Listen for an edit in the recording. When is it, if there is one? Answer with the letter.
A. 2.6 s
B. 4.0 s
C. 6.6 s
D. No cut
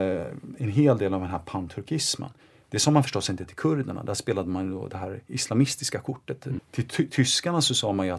C